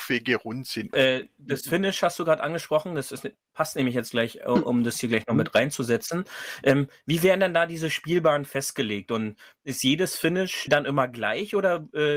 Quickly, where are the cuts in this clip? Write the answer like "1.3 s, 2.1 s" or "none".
0.9 s, 10.7 s

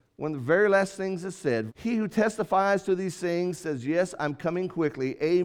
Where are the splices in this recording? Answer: 1.7 s

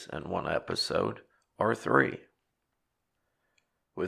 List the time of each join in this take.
none

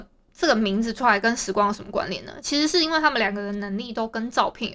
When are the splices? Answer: none

